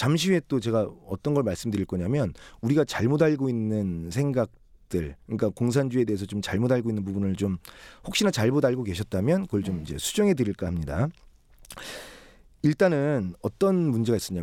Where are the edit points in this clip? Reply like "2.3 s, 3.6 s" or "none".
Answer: none

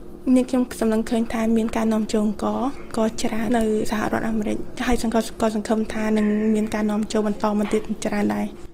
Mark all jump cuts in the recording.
3.5 s

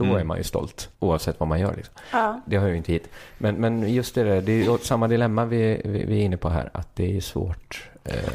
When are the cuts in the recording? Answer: 0.9 s

